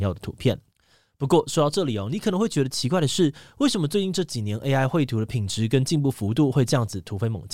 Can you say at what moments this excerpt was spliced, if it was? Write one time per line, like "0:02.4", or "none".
none